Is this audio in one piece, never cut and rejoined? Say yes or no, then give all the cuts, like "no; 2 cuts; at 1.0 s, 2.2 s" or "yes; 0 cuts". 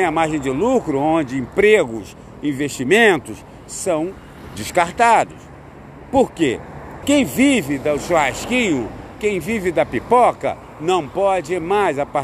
no; 1 cut; at 7.0 s